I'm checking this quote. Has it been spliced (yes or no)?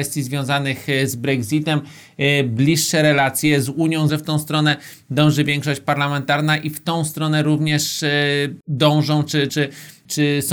yes